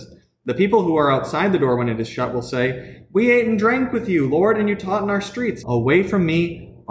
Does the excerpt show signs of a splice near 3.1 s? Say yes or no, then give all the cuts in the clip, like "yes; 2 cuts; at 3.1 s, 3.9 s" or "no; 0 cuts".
no; 1 cut; at 5.6 s